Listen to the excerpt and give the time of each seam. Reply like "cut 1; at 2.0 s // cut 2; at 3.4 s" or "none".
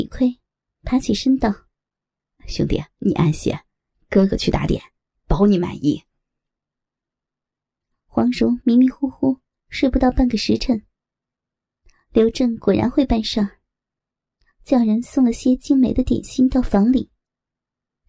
none